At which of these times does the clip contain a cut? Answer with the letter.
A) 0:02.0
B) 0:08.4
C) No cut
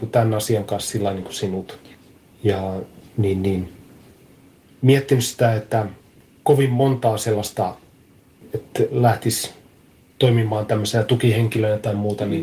B